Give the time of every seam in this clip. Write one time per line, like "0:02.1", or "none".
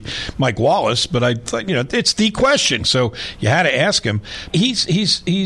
0:02.8
0:04.5

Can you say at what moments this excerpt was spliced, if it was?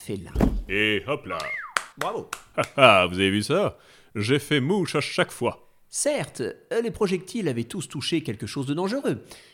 0:01.9

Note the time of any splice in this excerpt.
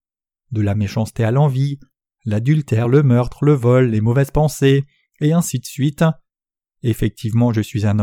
none

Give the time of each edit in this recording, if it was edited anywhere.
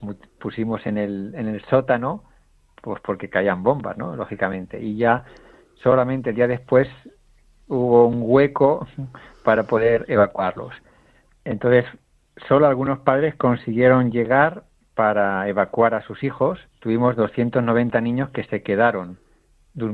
0:11.3
0:16.7

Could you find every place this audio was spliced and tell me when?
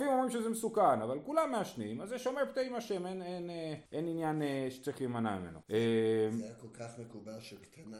0:03.9
0:05.6

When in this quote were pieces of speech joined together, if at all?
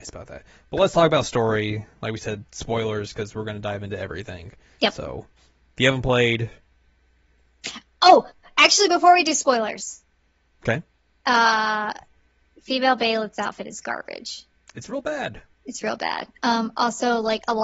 none

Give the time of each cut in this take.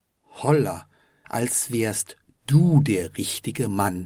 0:01.2

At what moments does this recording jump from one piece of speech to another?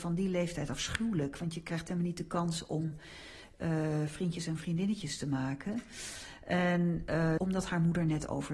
0:07.4

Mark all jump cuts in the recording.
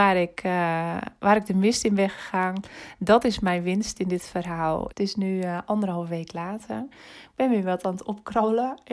0:04.9

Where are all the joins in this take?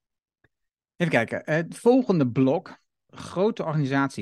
0:03.1

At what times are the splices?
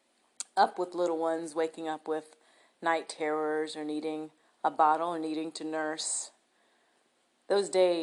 none

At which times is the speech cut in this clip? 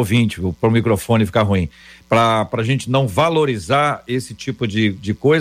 none

